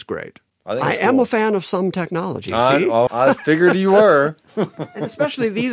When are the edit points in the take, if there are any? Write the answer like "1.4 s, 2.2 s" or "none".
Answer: 3.1 s